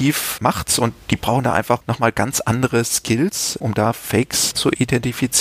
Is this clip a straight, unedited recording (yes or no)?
yes